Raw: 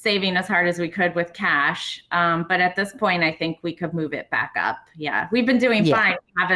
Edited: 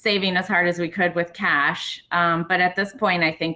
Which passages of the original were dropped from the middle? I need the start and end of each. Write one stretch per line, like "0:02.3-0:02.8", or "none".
none